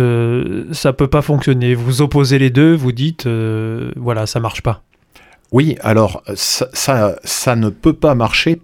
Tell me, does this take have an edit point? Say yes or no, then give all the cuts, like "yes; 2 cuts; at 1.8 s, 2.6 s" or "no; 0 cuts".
no; 0 cuts